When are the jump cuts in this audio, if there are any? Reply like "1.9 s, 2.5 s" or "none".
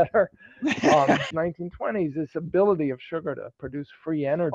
1.3 s